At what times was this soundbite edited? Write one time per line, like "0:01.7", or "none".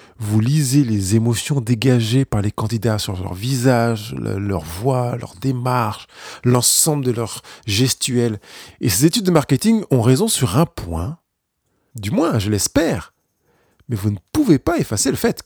0:08.7
0:11.9

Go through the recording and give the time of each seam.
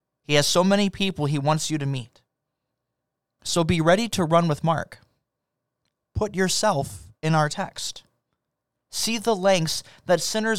0:03.4

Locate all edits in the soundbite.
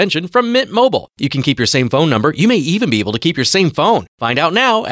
none

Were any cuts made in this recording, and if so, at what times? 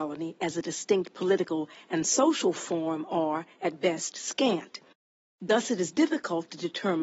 none

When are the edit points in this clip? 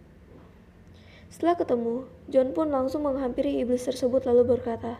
none

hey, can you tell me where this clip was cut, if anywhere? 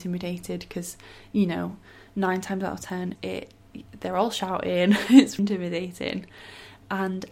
0:03.2
0:05.4

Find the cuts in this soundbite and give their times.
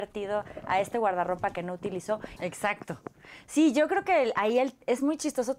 0:02.4

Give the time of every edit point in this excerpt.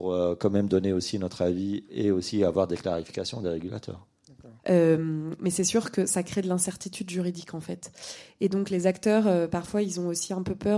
0:04.6

